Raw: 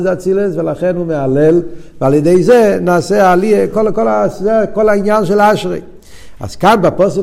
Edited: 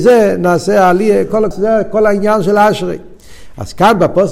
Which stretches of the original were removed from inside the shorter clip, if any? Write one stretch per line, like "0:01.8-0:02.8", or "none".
0:03.9-0:04.3